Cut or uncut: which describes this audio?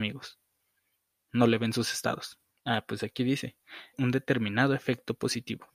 cut